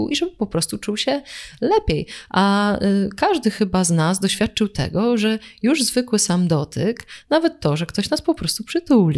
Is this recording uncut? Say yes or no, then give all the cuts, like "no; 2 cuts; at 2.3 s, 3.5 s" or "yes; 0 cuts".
yes; 0 cuts